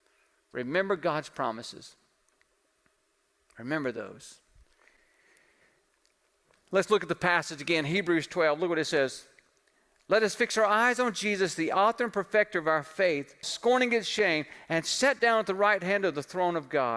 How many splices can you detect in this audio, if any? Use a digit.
1